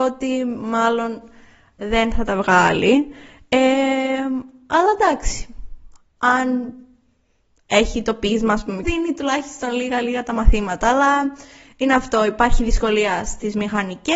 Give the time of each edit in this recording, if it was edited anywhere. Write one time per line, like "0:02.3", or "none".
0:08.8